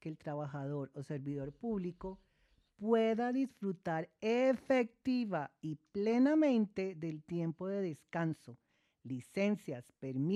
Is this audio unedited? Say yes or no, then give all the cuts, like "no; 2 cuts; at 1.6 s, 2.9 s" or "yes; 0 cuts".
yes; 0 cuts